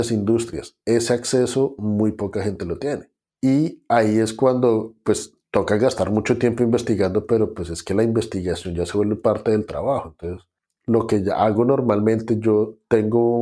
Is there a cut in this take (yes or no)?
no